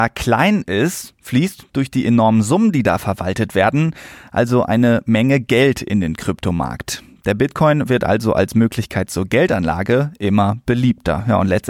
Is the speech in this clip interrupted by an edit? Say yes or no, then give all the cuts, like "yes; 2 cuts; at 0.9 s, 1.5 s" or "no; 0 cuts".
no; 0 cuts